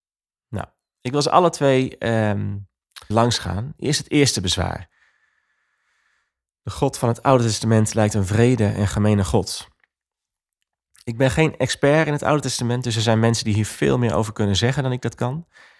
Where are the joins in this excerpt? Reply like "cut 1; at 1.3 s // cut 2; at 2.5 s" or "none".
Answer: cut 1; at 3.1 s